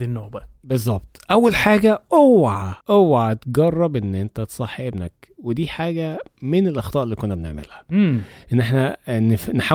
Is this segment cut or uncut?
cut